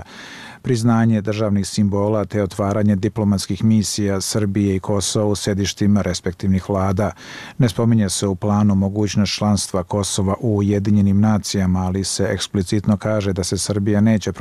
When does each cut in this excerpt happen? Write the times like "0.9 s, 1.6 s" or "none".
none